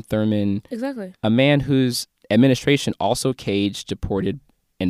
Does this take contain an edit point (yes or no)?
yes